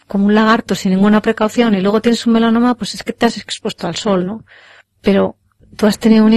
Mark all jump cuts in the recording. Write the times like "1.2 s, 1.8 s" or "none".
none